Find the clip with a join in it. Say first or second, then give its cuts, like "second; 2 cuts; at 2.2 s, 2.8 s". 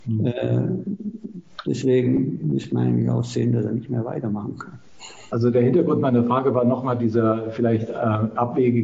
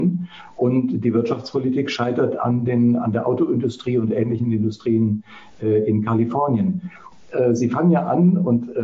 second; 1 cut; at 7.1 s